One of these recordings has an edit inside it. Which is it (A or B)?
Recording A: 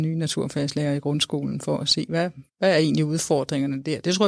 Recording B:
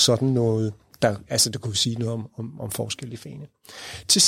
A